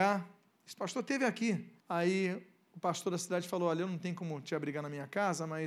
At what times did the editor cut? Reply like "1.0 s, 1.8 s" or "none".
1.8 s